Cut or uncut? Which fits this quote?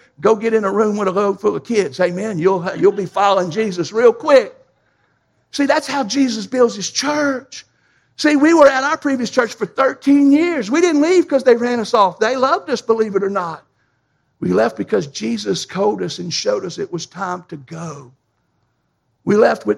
uncut